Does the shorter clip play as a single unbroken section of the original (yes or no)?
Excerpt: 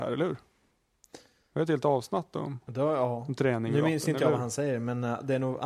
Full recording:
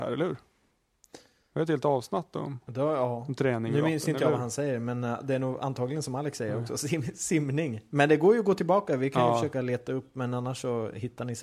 yes